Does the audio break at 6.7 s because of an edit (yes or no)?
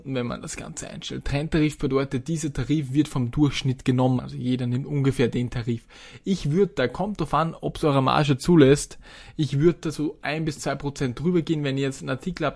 no